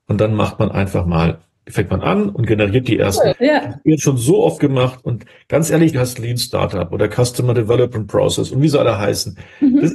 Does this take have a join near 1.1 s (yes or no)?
no